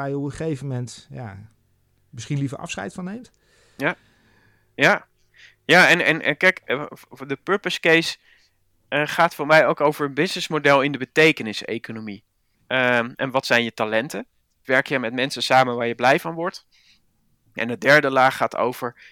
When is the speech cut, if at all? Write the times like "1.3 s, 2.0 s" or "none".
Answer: 12.5 s, 14.6 s